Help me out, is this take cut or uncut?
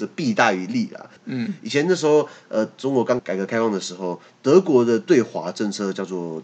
cut